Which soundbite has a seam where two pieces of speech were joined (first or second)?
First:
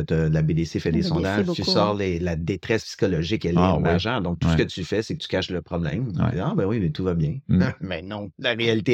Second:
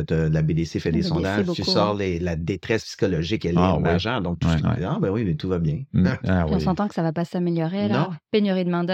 second